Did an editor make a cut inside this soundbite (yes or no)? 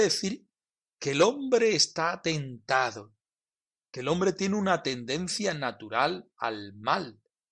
no